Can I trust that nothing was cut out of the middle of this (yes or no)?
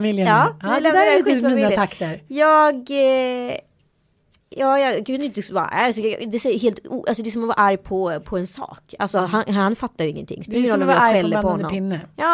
yes